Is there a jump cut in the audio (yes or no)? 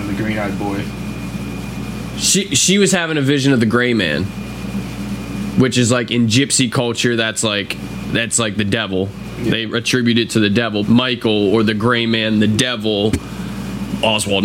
yes